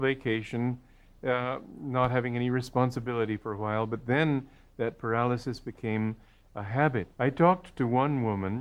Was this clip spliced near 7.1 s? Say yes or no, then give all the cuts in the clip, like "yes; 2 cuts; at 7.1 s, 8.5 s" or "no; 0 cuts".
yes; 1 cut; at 7.1 s